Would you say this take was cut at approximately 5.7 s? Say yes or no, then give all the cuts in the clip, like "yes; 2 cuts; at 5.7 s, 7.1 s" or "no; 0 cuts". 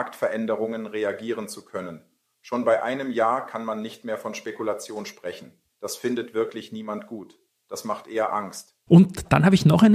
yes; 2 cuts; at 5.7 s, 8.9 s